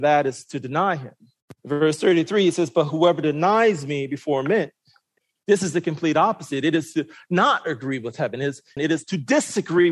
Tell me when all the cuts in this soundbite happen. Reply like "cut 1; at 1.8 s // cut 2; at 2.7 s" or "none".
cut 1; at 1.6 s // cut 2; at 8.8 s